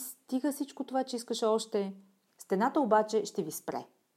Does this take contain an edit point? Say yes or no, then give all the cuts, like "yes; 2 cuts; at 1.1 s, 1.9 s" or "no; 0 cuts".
yes; 1 cut; at 2.3 s